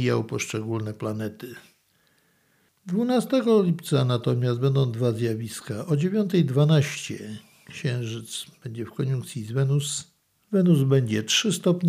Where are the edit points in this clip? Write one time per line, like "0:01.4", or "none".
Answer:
0:02.7

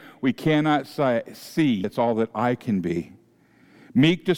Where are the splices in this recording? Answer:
0:01.8

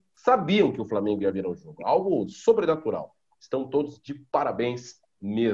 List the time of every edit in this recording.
0:03.3

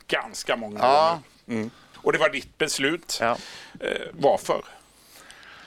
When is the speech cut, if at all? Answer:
0:01.9

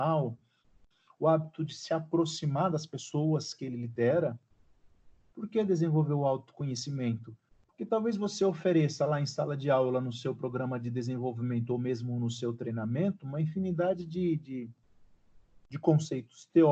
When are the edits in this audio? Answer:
0:05.3

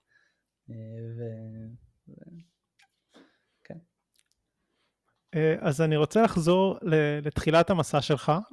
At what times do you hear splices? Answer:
none

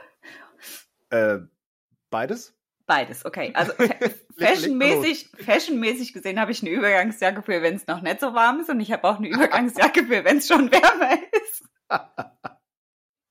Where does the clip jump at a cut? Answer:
none

